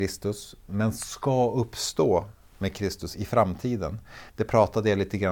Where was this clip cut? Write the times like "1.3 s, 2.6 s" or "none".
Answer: 3.1 s, 4.3 s